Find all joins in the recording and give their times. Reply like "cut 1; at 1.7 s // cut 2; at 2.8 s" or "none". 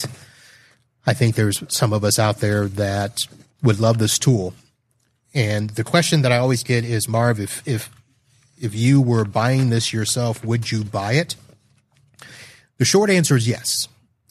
none